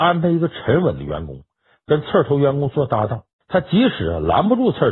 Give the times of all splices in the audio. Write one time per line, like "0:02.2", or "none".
0:03.4